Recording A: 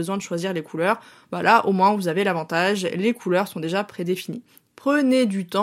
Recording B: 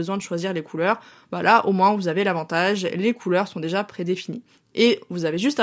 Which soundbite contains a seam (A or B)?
A